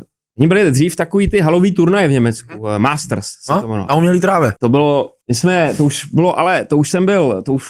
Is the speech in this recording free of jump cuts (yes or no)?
no